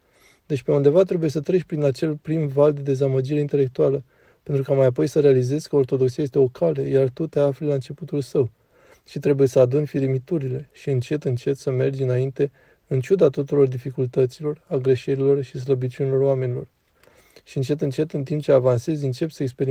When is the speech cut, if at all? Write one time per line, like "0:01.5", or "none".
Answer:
none